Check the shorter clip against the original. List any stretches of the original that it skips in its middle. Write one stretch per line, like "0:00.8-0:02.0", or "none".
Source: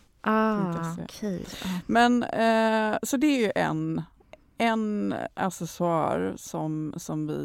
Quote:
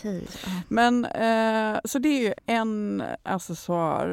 0:03.5-0:04.5